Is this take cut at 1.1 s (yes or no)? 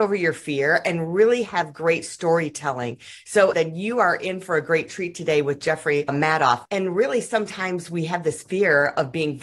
no